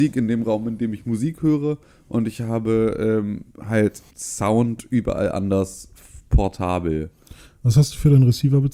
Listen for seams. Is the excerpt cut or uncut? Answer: cut